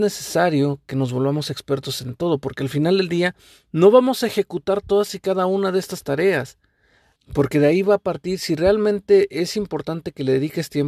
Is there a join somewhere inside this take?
yes; 1 cut; at 7.2 s

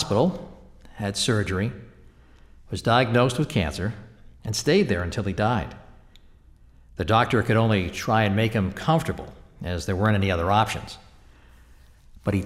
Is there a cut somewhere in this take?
no; 0 cuts

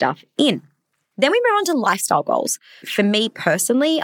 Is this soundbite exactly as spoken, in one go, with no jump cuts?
no; 1 cut; at 2.8 s

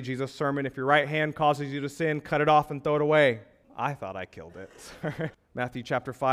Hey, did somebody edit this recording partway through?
yes; 2 cuts; at 3.6 s, 5.3 s

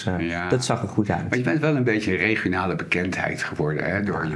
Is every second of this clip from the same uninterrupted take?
yes; 0 cuts

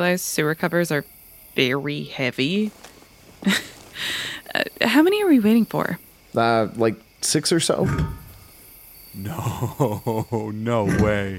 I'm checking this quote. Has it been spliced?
no; 0 cuts

